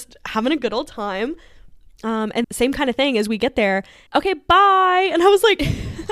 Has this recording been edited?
yes; 2 cuts; at 2.4 s, 4.1 s

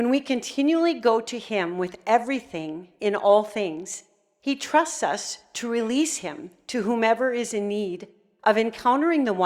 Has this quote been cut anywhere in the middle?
no; 0 cuts

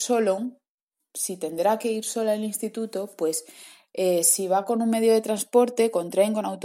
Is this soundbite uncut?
yes; 0 cuts

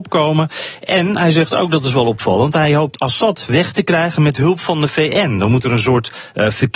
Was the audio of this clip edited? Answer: no; 0 cuts

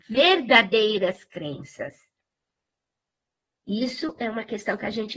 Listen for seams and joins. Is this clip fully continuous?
yes; 0 cuts

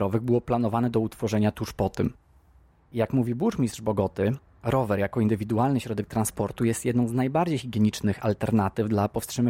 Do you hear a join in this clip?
no; 0 cuts

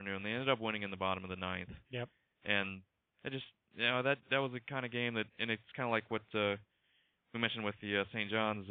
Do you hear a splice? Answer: no; 0 cuts

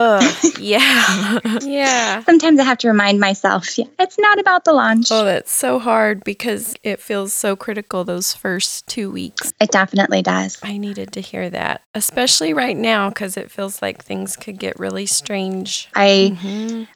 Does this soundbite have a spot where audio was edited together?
yes; 2 cuts; at 1.6 s, 15.9 s

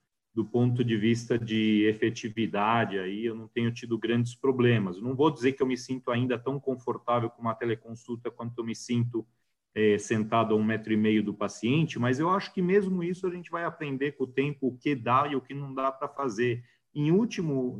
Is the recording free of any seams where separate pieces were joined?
yes; 0 cuts

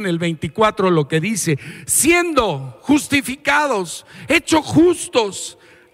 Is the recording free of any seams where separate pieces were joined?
yes; 0 cuts

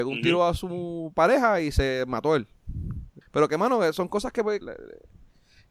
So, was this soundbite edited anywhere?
yes; 2 cuts; at 3.2 s, 4.6 s

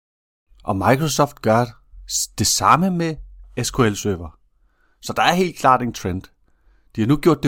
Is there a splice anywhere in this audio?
no; 0 cuts

